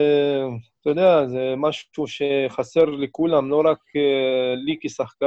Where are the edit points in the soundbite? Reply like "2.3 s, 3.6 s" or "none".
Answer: none